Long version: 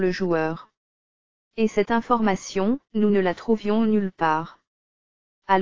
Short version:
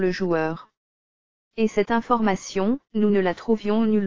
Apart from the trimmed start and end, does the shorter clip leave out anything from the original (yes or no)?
no